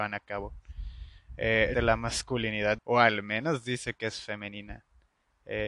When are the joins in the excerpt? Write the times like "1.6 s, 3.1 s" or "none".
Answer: 1.7 s, 2.8 s